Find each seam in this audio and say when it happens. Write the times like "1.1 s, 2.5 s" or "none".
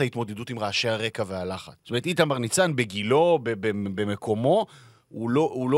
1.8 s